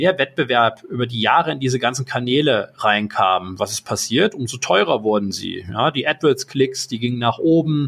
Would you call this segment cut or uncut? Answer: uncut